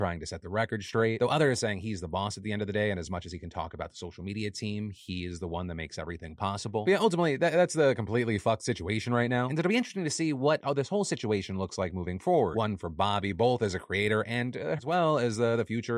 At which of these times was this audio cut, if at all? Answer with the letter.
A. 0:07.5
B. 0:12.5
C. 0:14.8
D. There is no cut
C